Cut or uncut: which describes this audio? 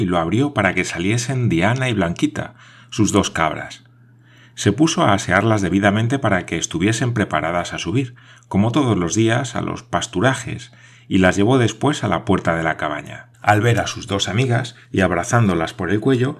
cut